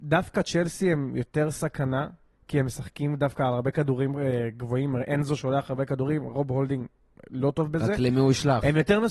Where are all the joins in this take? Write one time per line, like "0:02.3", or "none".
none